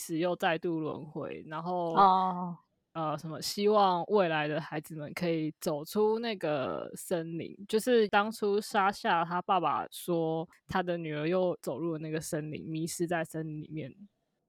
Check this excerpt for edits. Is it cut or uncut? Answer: uncut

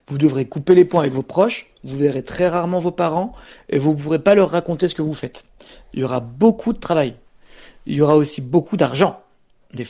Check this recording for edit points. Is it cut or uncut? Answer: uncut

